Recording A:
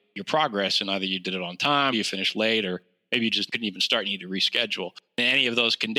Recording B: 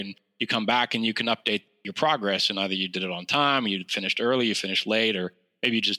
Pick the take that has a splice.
A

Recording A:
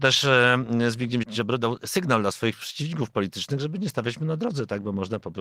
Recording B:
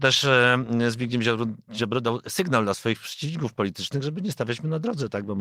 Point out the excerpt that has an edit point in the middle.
A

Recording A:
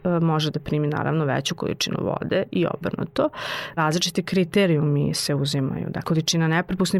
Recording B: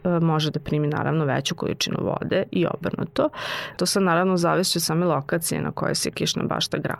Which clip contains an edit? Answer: B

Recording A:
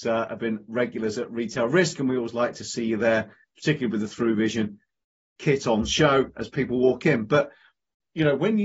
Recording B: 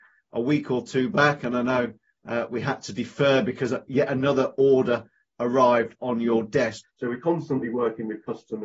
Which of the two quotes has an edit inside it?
B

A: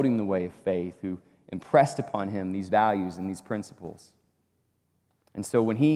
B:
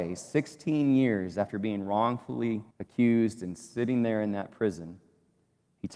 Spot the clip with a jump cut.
B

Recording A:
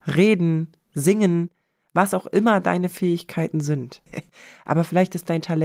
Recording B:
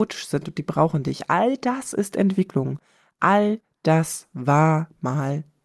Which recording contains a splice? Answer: A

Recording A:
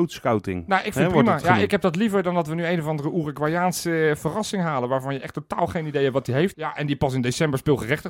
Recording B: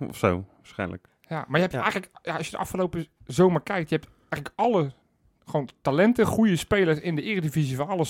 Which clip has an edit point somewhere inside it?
A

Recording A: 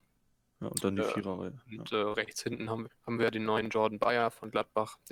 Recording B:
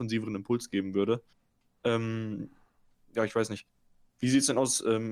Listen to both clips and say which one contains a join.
A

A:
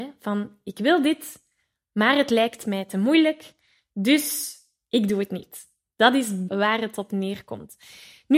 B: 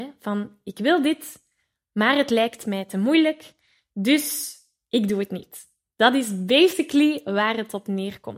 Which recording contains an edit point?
A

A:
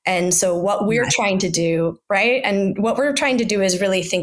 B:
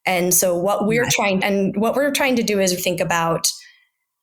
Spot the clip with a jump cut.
B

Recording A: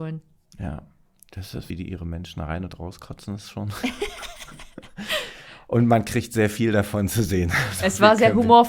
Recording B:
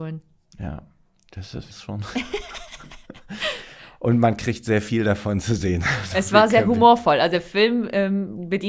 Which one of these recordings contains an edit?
B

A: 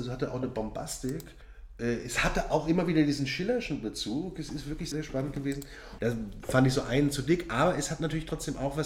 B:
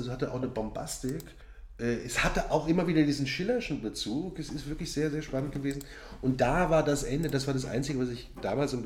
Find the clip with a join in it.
A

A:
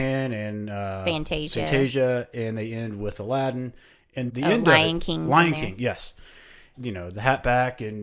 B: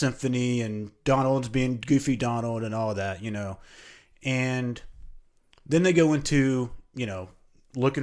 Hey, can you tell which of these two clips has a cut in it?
A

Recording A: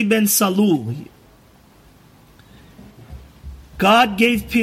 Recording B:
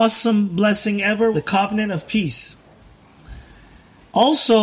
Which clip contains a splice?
B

